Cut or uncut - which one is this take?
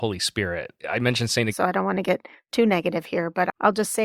cut